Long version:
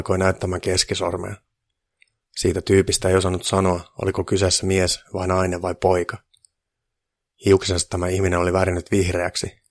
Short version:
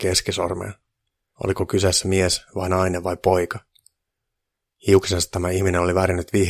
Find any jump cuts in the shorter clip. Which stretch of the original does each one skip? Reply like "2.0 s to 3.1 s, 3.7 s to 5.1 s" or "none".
2.0 s to 3.9 s